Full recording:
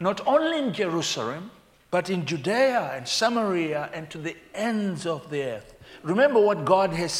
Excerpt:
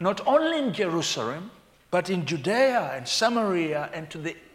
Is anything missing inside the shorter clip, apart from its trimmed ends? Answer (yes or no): no